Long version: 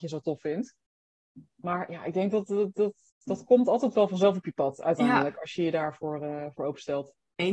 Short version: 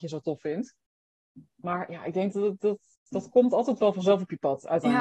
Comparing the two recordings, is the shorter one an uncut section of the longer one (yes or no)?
no